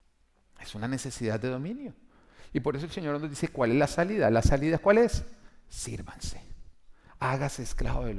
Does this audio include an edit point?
no; 0 cuts

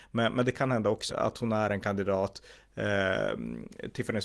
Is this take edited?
yes; 1 cut; at 1.1 s

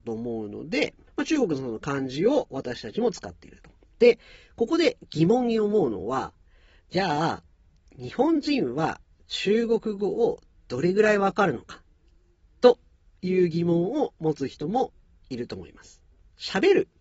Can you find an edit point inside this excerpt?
no; 0 cuts

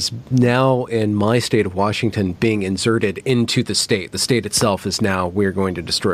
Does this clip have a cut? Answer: no; 0 cuts

